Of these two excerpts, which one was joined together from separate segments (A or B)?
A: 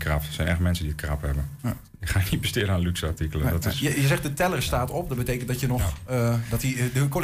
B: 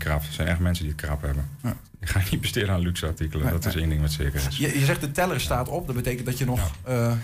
A